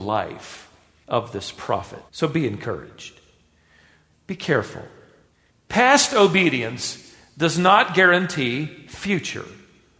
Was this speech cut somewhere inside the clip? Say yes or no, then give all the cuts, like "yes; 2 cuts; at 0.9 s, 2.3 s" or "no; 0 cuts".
yes; 2 cuts; at 2.1 s, 4.1 s